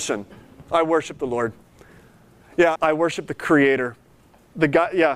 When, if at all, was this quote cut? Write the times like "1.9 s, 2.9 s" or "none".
2.8 s